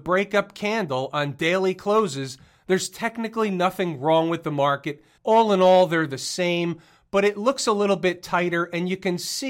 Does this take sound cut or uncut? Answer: cut